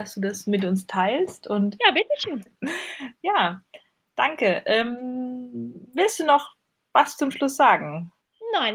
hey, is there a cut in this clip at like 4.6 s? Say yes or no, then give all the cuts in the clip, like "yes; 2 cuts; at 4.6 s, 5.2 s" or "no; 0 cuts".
no; 1 cut; at 2.5 s